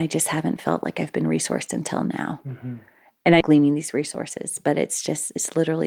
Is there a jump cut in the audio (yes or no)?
yes